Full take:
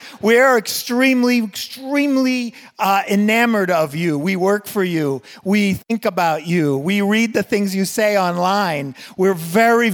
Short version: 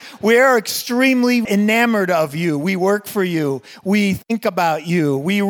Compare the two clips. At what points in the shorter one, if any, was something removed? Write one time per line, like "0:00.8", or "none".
0:01.4